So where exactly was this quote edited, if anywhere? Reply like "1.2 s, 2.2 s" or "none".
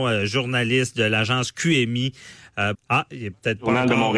2.7 s